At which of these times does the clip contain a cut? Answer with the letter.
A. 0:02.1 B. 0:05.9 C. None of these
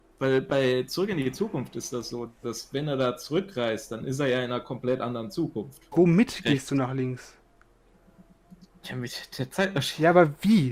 B